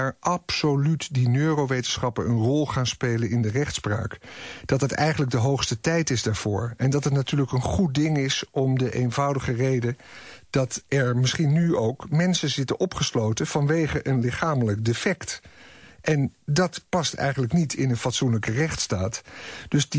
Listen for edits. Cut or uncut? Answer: uncut